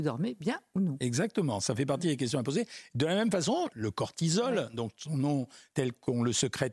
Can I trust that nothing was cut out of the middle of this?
no; 1 cut; at 3.7 s

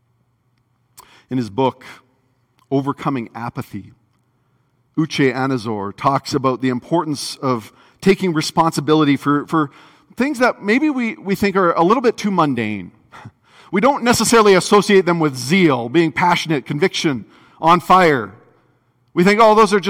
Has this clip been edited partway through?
no; 0 cuts

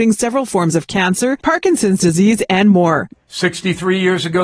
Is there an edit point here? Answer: yes; 2 cuts; at 1.4 s, 3.1 s

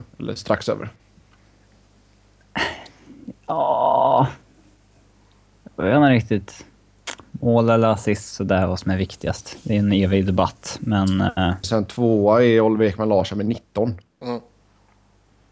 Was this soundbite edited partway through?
yes; 1 cut; at 11.6 s

